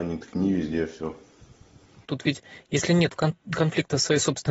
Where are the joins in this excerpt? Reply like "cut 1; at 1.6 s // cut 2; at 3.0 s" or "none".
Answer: cut 1; at 2.1 s